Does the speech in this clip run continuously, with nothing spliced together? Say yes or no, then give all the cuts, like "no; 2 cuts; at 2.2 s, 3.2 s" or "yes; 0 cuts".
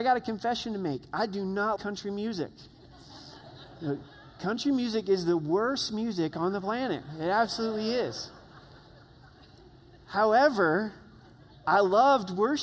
no; 1 cut; at 1.8 s